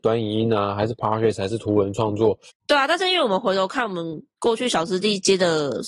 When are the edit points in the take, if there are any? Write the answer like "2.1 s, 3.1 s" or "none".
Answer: 2.5 s